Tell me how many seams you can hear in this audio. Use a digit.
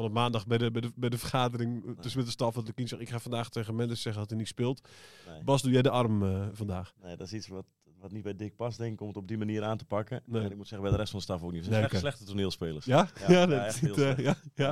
0